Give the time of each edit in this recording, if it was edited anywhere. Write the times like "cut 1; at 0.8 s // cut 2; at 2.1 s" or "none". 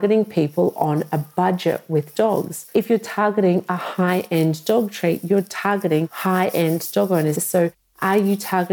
cut 1; at 7.3 s